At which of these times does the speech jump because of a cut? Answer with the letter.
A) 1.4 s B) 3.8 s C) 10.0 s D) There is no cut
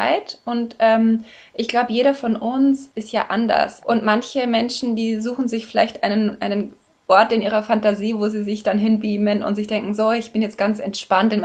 B